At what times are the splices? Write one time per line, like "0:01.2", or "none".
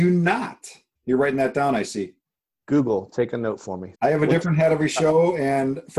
0:01.0
0:03.9